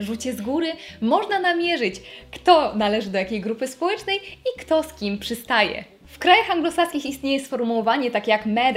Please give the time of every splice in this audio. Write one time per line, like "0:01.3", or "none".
0:06.0